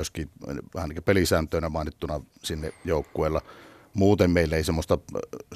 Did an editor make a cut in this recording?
no; 0 cuts

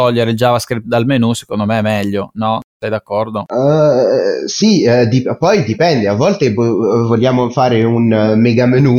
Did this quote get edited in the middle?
no; 0 cuts

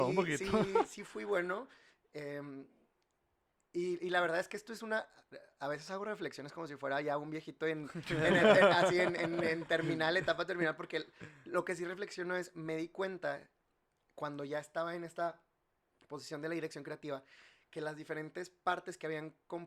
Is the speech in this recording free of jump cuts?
yes; 0 cuts

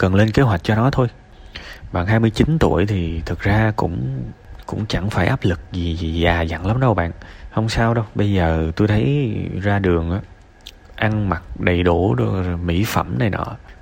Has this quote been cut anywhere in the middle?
yes; 1 cut; at 10.8 s

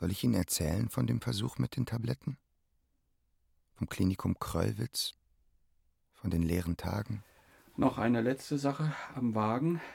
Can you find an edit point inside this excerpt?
no; 0 cuts

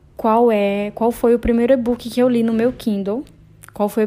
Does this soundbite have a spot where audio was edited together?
no; 0 cuts

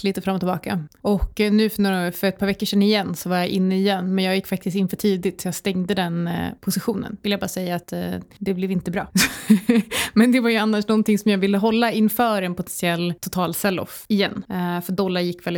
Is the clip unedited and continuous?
yes; 0 cuts

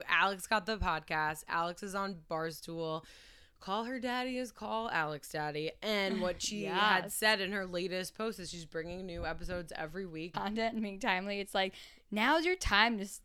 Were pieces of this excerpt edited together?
yes; 1 cut; at 10.3 s

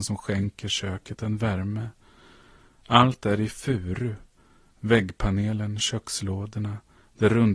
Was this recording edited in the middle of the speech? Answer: yes; 1 cut; at 5.8 s

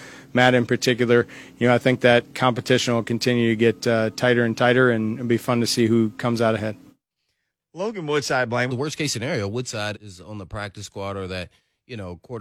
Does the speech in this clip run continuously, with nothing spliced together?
no; 2 cuts; at 8.7 s, 9.9 s

